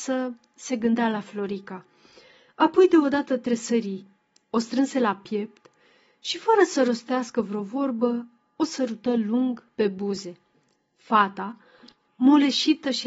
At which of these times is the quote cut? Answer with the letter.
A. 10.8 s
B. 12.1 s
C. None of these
B